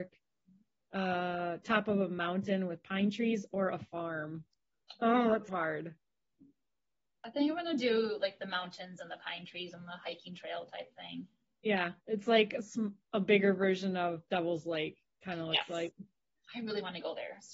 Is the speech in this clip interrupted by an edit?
yes; 2 cuts; at 5.5 s, 12.0 s

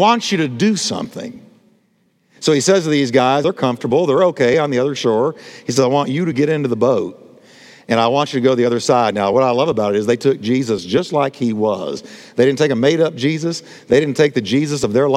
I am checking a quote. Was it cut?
yes; 1 cut; at 3.4 s

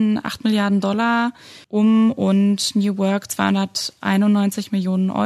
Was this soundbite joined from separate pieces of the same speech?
yes; 1 cut; at 1.6 s

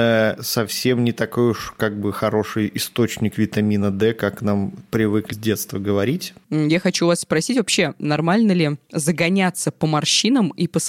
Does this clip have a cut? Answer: yes; 2 cuts; at 5.3 s, 6.4 s

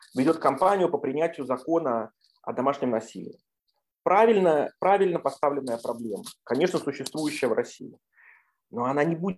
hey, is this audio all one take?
yes; 0 cuts

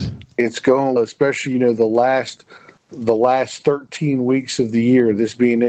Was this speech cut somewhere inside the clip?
yes; 1 cut; at 1.0 s

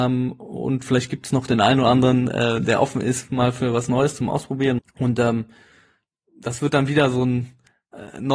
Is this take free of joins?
no; 1 cut; at 4.8 s

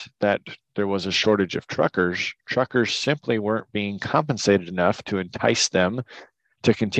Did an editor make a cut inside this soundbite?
no; 0 cuts

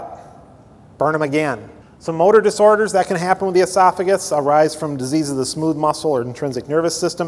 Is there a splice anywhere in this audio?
yes; 1 cut; at 1.8 s

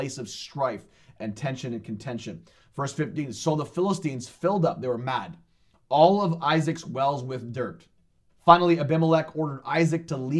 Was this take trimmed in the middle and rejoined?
yes; 1 cut; at 8.3 s

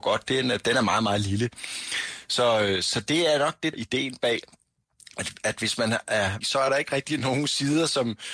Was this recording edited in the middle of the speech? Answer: yes; 2 cuts; at 3.7 s, 6.4 s

